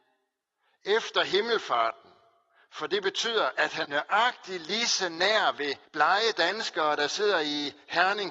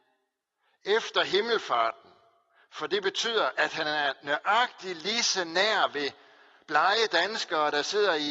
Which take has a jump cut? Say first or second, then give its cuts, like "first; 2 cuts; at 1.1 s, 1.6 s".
first; 2 cuts; at 3.8 s, 5.9 s